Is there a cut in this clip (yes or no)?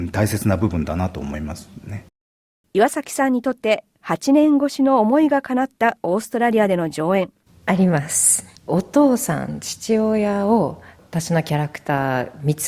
yes